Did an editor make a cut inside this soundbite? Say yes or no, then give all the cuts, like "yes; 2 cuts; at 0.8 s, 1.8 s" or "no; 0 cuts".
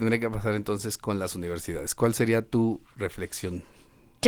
no; 0 cuts